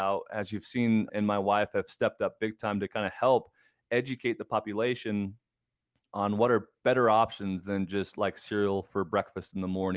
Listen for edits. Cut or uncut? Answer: cut